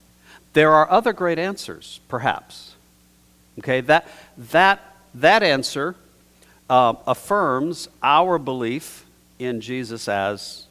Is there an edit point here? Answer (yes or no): no